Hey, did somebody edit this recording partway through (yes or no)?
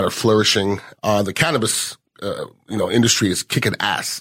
yes